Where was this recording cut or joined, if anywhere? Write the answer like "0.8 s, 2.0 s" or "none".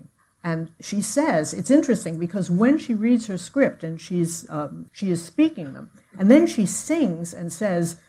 4.9 s